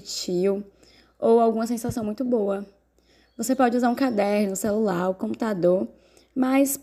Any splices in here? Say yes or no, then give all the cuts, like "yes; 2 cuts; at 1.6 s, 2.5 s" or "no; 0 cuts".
no; 0 cuts